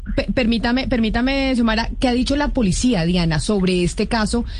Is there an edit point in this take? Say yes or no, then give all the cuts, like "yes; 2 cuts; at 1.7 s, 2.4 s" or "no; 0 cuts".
no; 0 cuts